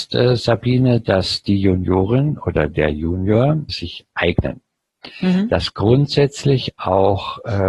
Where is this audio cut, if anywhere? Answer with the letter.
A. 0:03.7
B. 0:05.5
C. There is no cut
A